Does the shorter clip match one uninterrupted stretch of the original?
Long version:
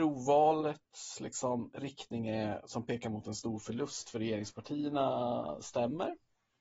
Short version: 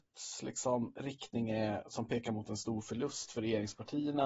yes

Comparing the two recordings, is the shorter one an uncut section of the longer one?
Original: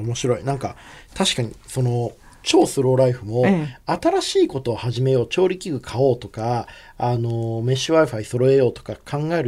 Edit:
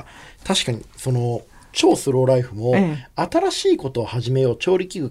yes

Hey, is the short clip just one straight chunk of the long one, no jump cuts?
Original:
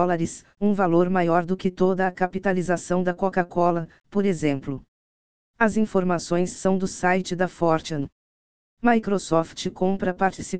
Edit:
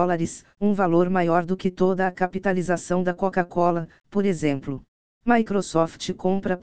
no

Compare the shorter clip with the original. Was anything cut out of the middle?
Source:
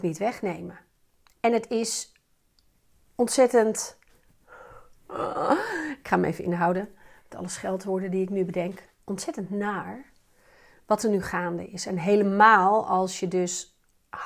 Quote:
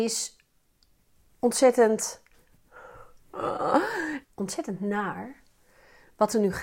yes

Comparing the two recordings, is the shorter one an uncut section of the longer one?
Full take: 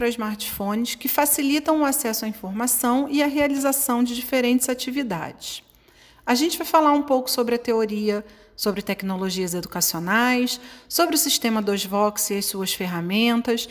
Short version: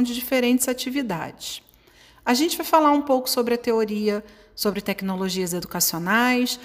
yes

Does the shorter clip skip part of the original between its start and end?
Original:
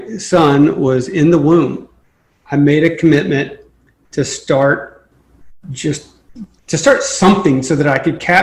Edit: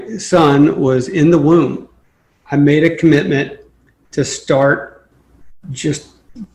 no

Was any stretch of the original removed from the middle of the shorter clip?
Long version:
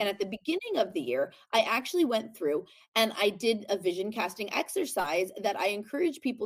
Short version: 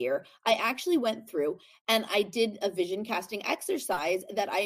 no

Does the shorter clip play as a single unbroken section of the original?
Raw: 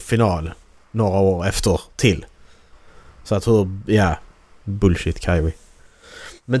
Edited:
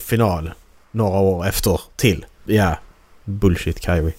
no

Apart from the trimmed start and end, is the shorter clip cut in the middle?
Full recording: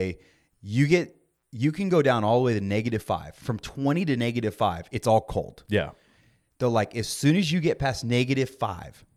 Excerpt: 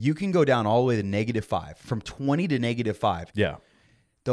yes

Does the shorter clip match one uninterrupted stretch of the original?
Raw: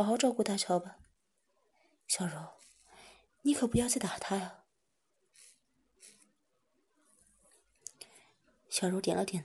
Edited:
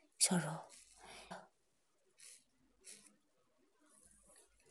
no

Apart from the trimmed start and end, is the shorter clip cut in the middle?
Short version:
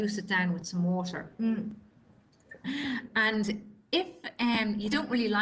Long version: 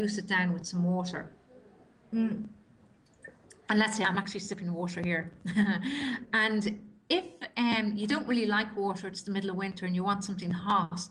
yes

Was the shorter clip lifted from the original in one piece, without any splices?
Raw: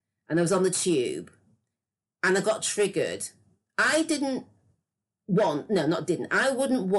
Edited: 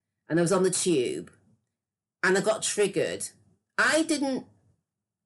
yes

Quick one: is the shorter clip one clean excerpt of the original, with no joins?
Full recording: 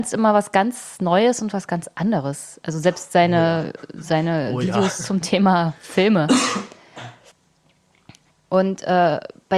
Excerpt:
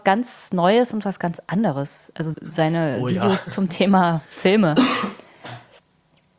no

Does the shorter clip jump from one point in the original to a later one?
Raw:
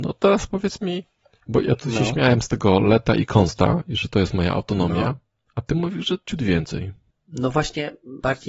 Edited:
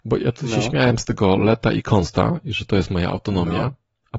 no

